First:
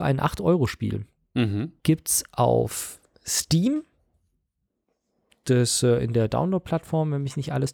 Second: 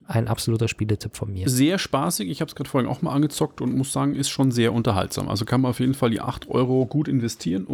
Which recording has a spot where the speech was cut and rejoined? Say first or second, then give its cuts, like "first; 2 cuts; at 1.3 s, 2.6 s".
first; 1 cut; at 1.8 s